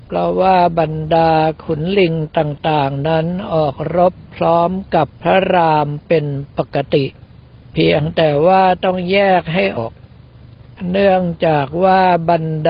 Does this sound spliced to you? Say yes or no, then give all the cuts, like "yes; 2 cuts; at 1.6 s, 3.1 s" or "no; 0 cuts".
yes; 1 cut; at 9.8 s